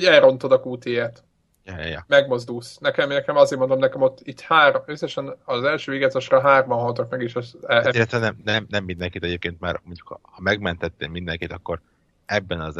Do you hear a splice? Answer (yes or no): no